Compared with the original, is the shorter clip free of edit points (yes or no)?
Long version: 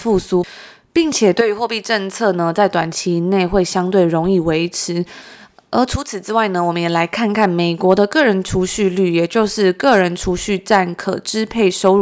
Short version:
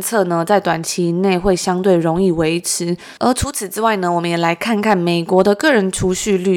no